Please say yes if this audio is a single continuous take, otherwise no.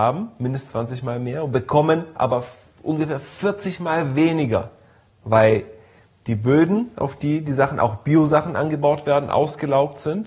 yes